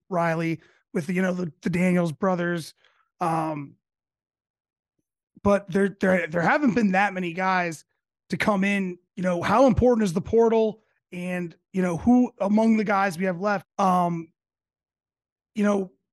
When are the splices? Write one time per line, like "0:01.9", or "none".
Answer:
0:09.1
0:13.6